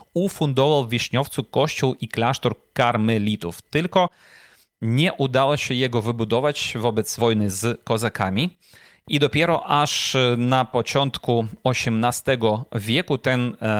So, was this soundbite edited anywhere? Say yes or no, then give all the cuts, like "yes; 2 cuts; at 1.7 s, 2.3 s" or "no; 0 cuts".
yes; 1 cut; at 7.2 s